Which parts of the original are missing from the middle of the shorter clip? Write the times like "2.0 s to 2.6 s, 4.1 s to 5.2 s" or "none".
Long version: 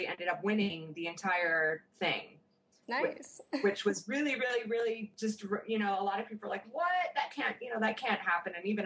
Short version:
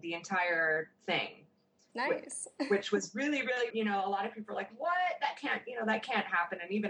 4.6 s to 5.6 s